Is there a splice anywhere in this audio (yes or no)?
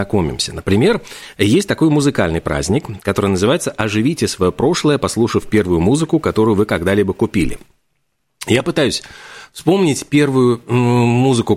no